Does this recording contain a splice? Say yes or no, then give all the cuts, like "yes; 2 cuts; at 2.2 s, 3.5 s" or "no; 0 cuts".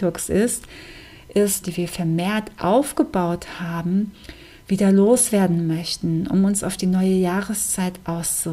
yes; 1 cut; at 1.6 s